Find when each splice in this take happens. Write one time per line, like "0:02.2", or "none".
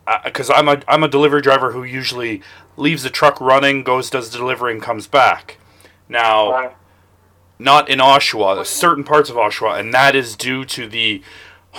none